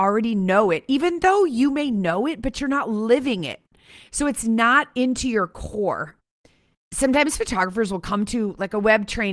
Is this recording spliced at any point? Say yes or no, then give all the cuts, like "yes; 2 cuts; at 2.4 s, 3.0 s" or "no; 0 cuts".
no; 0 cuts